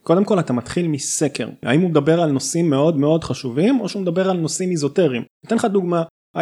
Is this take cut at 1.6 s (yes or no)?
yes